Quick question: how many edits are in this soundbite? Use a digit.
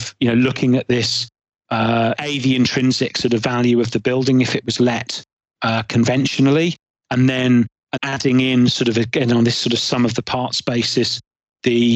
2